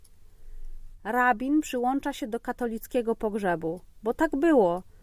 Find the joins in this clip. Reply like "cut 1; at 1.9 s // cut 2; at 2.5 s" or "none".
cut 1; at 0.9 s